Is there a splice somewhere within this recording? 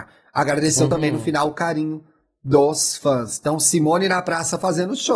no; 0 cuts

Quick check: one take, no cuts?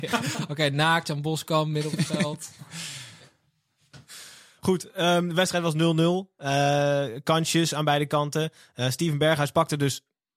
yes; 0 cuts

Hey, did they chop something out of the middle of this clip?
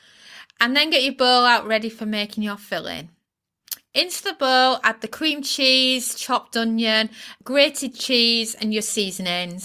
yes; 1 cut; at 7.4 s

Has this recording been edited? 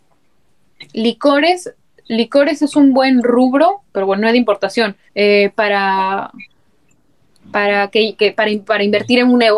yes; 1 cut; at 5.1 s

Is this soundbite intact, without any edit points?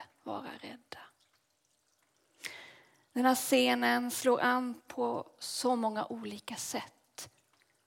yes; 0 cuts

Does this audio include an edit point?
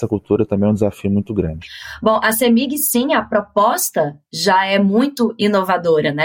no; 0 cuts

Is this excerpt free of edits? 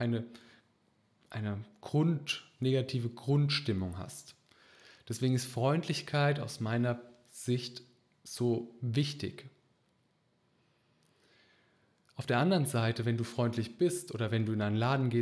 yes; 0 cuts

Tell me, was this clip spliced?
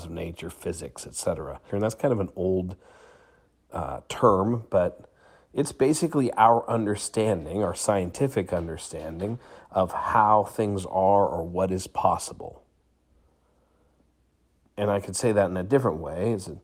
yes; 1 cut; at 1.7 s

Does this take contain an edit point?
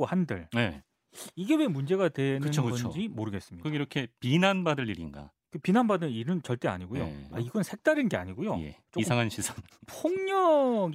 yes; 1 cut; at 7.3 s

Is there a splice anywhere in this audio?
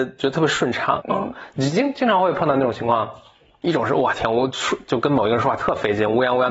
yes; 1 cut; at 1.0 s

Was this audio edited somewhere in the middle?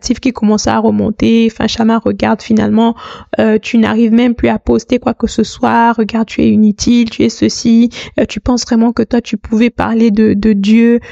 no; 0 cuts

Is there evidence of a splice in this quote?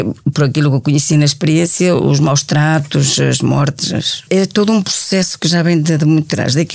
yes; 1 cut; at 4.3 s

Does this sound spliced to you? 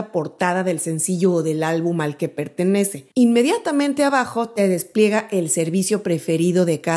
yes; 1 cut; at 3.1 s

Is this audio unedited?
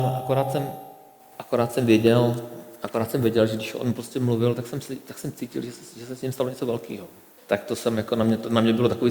no; 1 cut; at 7.4 s

